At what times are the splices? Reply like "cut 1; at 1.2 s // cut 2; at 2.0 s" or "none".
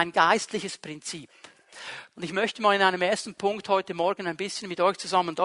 cut 1; at 2.1 s